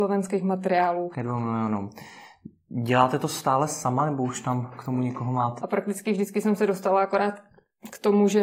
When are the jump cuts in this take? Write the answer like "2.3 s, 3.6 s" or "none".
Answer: 1.1 s, 5.6 s